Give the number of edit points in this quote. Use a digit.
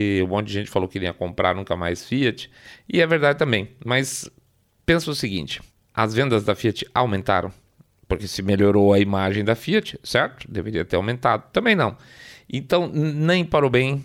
0